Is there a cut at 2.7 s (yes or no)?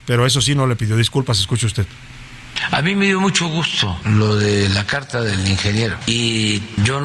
no